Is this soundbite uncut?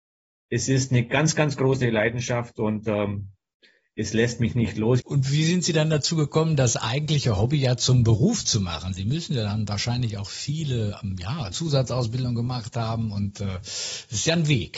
no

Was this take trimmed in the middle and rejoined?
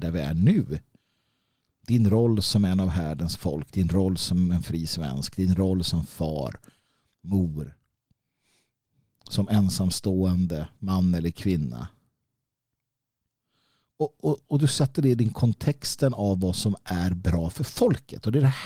no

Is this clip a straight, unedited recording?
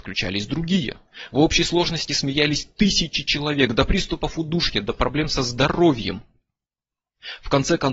yes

